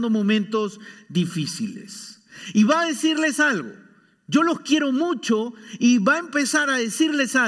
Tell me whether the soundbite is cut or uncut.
uncut